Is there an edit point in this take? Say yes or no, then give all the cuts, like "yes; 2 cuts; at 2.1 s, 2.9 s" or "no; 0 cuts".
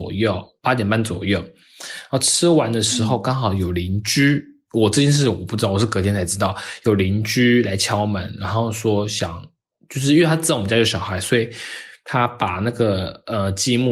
no; 0 cuts